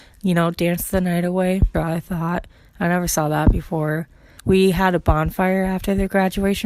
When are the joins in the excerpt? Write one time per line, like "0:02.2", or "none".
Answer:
0:01.7
0:04.4